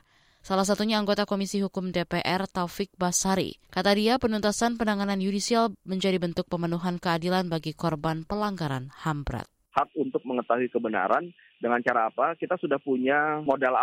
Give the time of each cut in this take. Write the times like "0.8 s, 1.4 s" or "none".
3.6 s